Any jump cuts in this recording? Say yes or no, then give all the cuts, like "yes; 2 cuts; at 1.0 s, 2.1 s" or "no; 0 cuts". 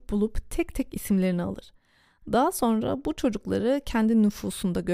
no; 0 cuts